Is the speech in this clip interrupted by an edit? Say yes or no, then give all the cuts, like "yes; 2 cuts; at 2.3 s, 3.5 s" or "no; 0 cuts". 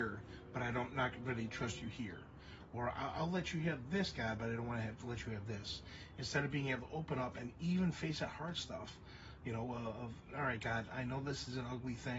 no; 0 cuts